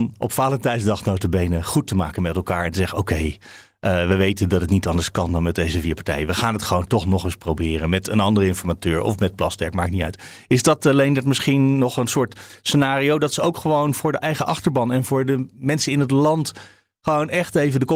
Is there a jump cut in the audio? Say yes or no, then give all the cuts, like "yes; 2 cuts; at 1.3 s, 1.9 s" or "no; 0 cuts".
no; 0 cuts